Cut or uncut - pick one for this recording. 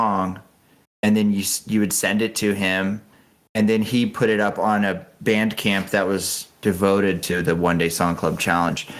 uncut